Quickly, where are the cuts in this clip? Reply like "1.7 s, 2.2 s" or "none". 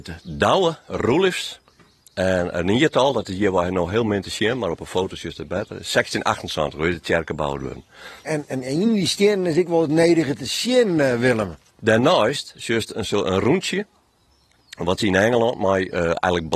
8.2 s, 11.7 s